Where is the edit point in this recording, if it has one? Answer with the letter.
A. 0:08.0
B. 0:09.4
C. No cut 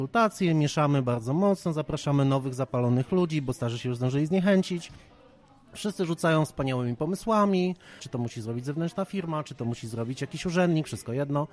A